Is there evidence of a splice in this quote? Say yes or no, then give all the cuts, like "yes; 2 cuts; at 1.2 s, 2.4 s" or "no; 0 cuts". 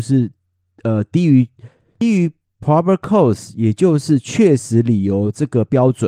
no; 0 cuts